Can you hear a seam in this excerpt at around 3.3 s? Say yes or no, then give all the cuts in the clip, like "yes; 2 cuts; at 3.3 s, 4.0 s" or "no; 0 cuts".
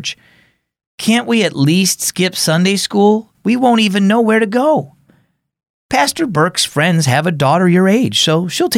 yes; 1 cut; at 3.3 s